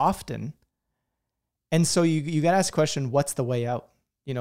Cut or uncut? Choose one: uncut